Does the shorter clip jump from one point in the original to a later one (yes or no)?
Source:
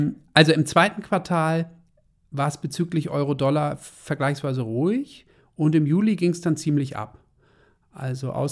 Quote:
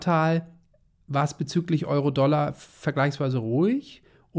no